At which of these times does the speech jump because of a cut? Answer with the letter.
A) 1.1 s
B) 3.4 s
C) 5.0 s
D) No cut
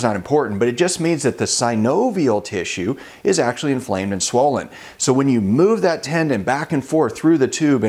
D